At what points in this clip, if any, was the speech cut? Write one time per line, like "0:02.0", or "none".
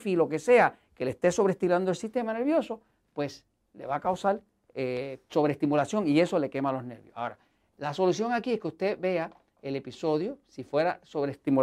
0:05.3